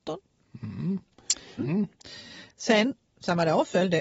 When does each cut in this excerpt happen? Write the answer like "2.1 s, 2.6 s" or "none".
1.6 s